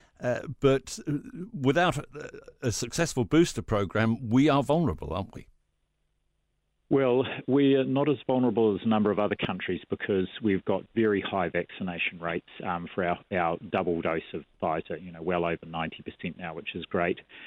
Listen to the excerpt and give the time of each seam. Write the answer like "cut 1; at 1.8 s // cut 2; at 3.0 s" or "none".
none